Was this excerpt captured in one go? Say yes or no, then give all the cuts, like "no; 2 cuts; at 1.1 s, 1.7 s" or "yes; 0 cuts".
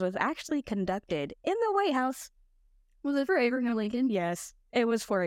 yes; 0 cuts